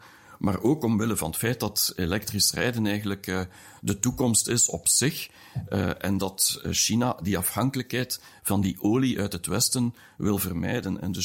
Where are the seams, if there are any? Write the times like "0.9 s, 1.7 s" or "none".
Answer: none